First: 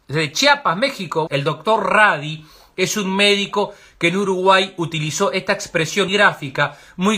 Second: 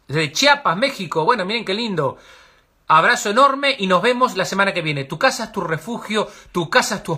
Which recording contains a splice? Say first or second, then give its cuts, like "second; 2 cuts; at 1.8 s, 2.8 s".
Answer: first; 2 cuts; at 1.3 s, 6.1 s